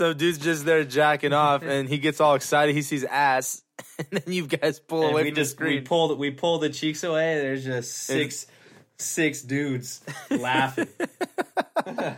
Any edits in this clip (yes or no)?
no